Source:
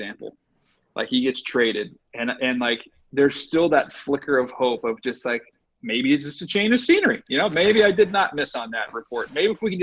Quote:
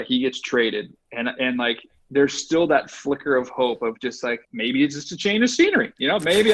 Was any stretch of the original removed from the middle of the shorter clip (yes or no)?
yes